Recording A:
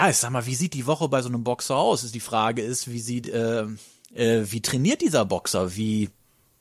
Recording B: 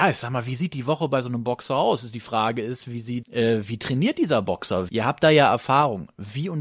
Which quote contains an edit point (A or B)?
B